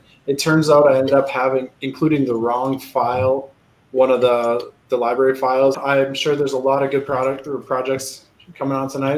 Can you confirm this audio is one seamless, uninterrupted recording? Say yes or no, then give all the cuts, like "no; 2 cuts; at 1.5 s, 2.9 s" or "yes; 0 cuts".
no; 2 cuts; at 1.7 s, 5.7 s